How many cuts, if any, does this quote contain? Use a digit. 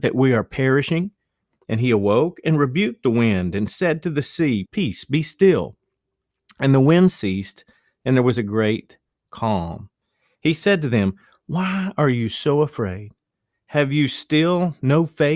1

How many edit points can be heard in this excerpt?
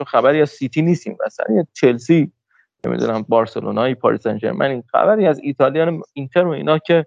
0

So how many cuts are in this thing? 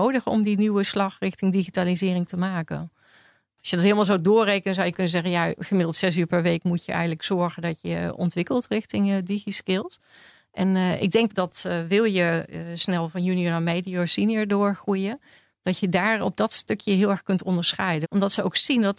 2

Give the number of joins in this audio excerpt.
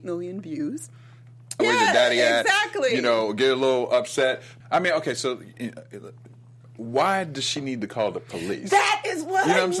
2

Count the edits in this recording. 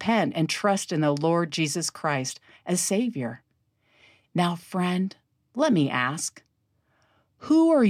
1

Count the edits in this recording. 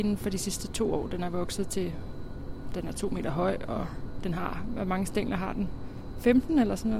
0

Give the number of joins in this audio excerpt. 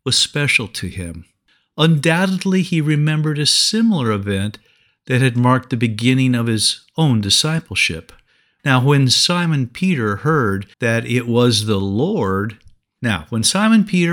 2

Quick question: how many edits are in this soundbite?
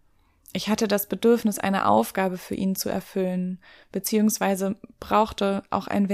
0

